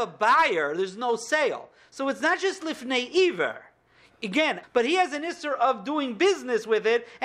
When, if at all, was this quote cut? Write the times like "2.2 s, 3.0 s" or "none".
4.6 s

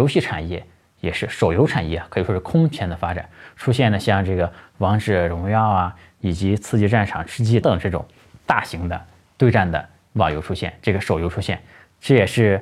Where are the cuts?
7.6 s

